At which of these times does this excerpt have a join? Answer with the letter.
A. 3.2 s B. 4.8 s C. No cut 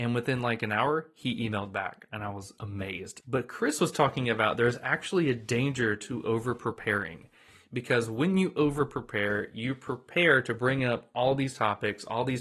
A